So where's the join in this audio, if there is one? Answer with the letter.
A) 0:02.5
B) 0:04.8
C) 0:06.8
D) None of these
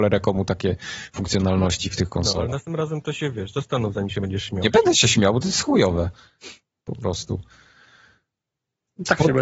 D